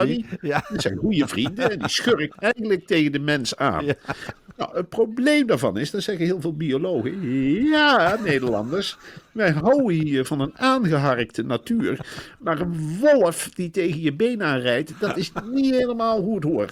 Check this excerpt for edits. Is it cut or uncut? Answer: uncut